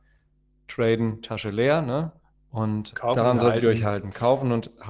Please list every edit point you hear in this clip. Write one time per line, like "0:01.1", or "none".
0:02.9